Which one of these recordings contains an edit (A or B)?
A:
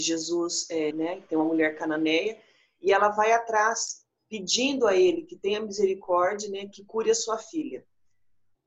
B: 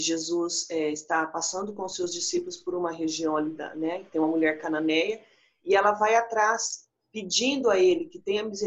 A